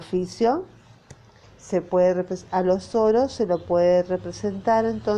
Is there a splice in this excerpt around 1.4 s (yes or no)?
yes